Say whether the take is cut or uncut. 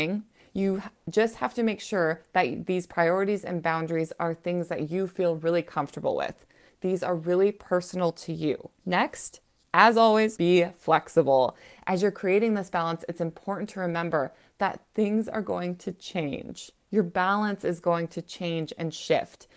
cut